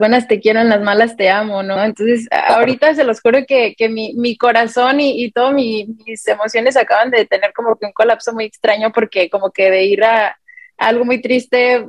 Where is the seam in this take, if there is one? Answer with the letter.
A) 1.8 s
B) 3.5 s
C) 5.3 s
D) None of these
A